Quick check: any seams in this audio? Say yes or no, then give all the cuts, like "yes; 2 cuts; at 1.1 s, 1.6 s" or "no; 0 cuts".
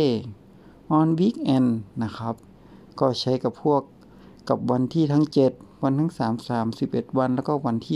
no; 0 cuts